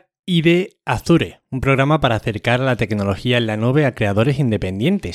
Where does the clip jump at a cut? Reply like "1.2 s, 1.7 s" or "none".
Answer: none